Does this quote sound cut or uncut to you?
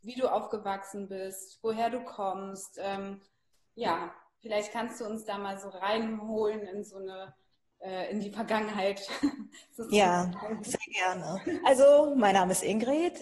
uncut